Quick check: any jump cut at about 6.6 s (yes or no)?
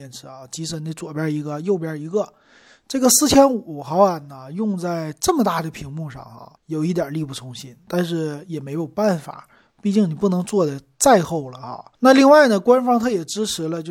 yes